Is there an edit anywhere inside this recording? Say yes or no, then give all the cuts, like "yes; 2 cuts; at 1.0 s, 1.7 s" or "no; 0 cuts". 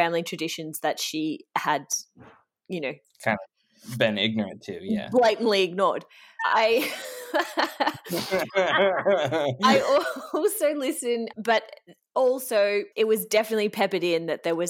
yes; 3 cuts; at 6.4 s, 11.3 s, 12.9 s